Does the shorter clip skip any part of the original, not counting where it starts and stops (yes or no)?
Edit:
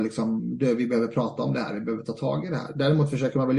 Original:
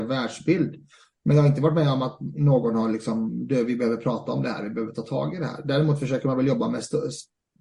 no